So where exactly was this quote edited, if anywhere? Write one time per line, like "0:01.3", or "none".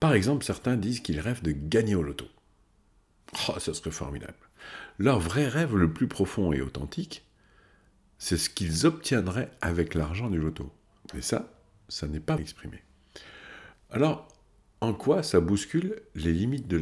0:11.0
0:12.4
0:13.7